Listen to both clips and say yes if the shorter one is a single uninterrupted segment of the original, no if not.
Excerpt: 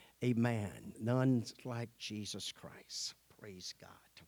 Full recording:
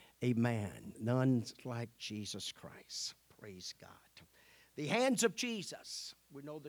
yes